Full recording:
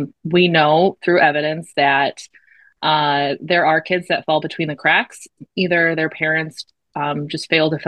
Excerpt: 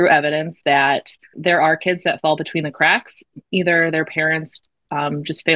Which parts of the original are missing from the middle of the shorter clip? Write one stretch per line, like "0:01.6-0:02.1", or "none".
0:02.4-0:03.4